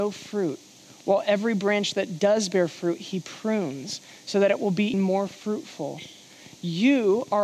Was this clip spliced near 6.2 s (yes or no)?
no